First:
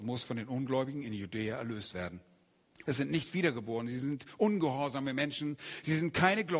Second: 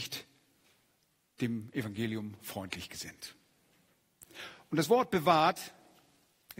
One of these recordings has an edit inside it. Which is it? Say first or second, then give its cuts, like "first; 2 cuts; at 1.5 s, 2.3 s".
first; 1 cut; at 2.8 s